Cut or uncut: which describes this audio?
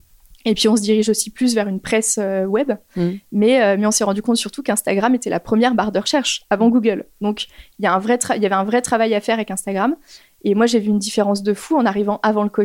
uncut